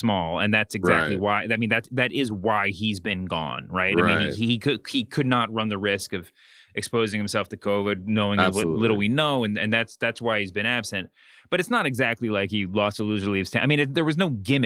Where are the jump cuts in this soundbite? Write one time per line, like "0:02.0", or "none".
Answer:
none